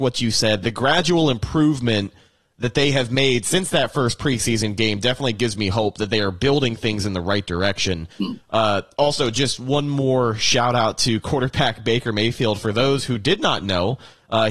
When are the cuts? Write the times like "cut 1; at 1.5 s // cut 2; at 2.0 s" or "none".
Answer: none